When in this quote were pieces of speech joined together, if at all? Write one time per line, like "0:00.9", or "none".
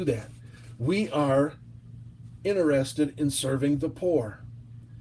none